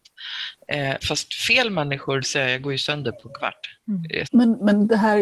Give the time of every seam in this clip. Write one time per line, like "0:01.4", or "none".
0:01.0
0:02.2
0:04.2